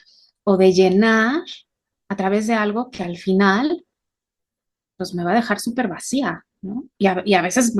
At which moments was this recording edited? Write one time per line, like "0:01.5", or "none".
none